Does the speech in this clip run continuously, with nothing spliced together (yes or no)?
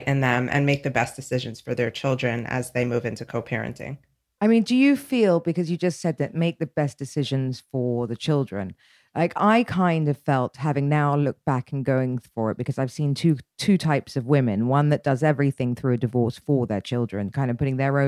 yes